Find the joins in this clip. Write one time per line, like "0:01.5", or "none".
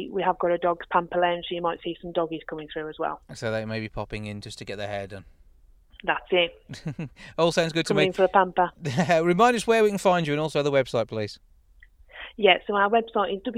none